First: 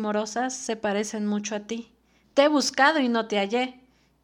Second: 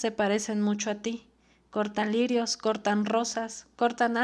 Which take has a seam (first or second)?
first